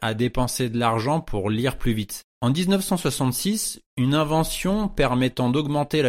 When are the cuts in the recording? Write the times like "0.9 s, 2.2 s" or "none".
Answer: 2.3 s